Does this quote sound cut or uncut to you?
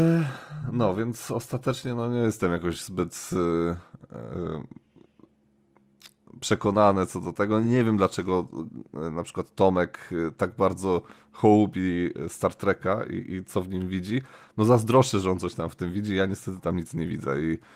uncut